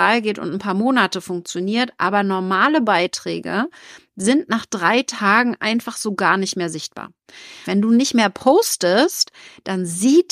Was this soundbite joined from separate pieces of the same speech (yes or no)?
yes